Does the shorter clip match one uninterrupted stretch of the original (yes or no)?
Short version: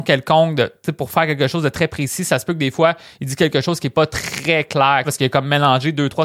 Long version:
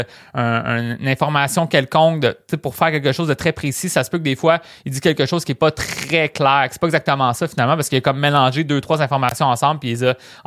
no